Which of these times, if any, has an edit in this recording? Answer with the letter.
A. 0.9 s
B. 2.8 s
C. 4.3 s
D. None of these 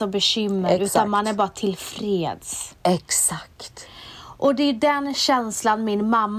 D